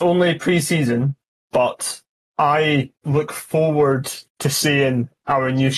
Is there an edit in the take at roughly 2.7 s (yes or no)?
no